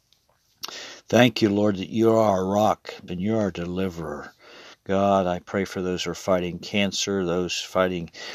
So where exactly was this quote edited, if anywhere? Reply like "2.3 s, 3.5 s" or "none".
3.1 s, 4.7 s